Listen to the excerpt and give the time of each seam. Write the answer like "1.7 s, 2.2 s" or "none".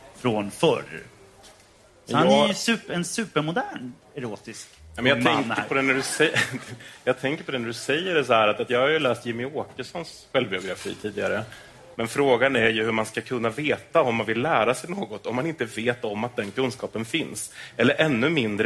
11.9 s

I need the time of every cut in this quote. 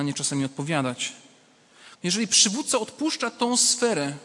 1.9 s

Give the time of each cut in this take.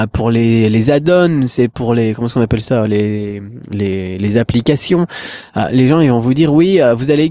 none

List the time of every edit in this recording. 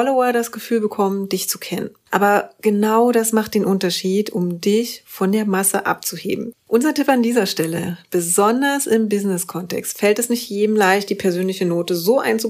6.5 s

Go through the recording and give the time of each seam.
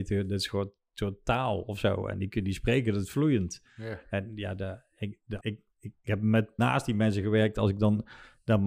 5.4 s, 6.6 s

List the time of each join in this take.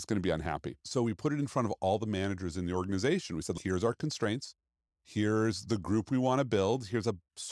none

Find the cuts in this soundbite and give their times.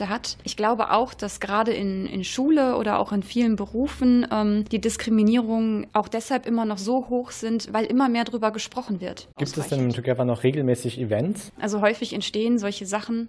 9.3 s, 11.5 s

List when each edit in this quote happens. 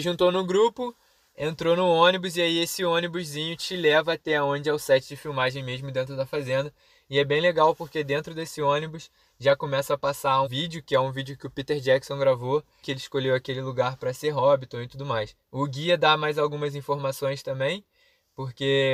10.4 s, 12.8 s, 15.4 s

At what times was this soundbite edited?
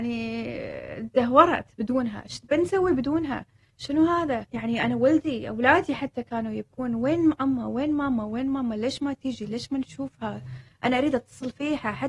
4.5 s

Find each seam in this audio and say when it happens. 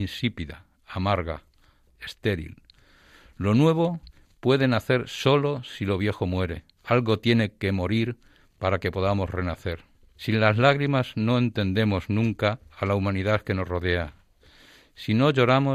1.9 s, 6.8 s, 10.1 s

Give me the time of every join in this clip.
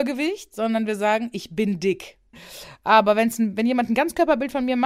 2.3 s

